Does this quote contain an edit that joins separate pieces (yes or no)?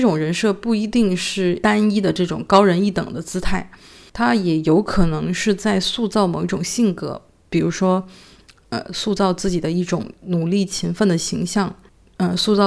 no